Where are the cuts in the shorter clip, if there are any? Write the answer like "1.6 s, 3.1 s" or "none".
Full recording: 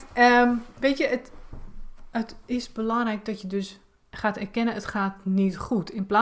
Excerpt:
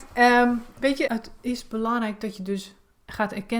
1.1 s